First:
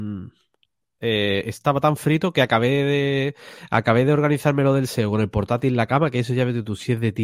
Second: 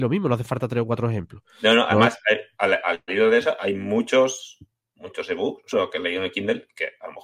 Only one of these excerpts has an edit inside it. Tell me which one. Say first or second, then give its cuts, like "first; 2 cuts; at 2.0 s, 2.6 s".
second; 1 cut; at 5.7 s